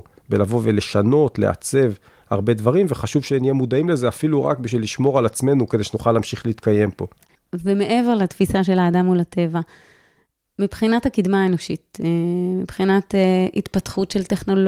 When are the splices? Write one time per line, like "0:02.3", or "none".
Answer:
none